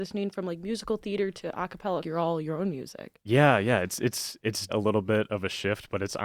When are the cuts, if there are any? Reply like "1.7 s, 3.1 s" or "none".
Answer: 2.0 s, 4.7 s